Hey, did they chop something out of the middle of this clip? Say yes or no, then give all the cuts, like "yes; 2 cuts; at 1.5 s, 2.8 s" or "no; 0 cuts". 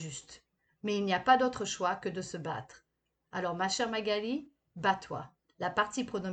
yes; 1 cut; at 5.4 s